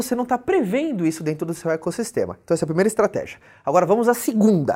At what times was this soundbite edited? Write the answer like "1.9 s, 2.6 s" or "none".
none